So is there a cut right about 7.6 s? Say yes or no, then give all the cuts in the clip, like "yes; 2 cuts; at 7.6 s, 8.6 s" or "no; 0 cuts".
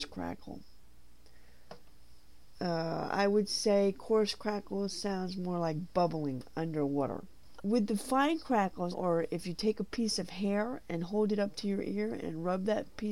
yes; 2 cuts; at 7.6 s, 8.9 s